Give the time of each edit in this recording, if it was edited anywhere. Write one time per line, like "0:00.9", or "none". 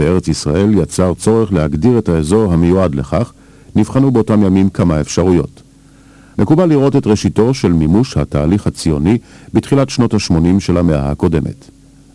0:06.3